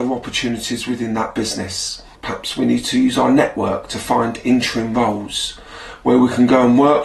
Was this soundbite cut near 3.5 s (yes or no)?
no